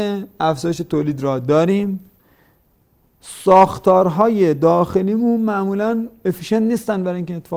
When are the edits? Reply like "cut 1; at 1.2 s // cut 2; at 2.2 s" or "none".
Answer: none